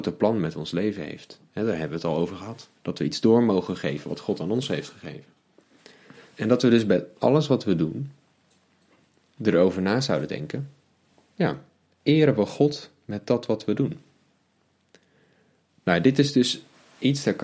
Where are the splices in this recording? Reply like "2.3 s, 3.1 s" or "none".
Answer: 2.8 s